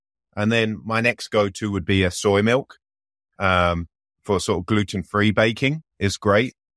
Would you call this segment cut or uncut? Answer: uncut